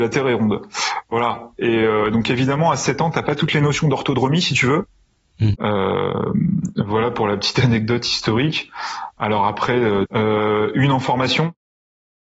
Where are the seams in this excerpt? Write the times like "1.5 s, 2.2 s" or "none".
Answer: 5.5 s, 10.0 s